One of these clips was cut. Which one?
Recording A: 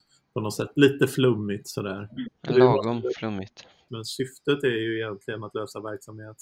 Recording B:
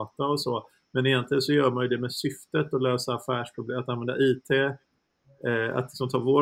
A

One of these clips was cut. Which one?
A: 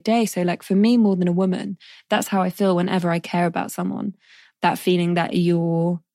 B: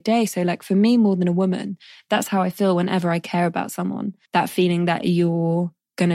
B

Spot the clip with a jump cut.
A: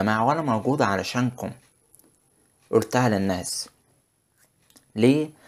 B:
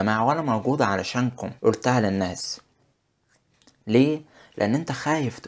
B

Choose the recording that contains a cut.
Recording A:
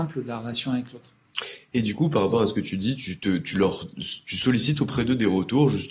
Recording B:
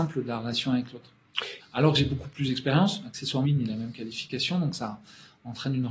B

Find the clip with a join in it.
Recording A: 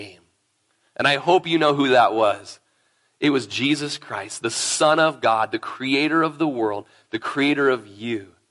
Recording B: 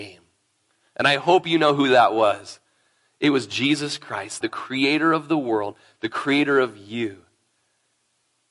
B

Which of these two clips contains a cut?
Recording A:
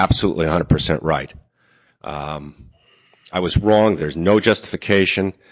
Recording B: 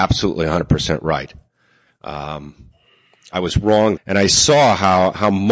B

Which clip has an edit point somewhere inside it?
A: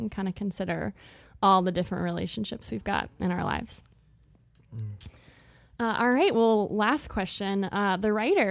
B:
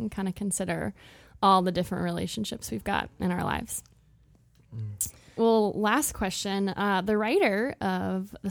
B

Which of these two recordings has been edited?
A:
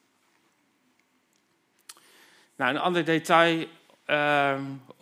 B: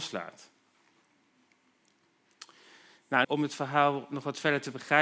B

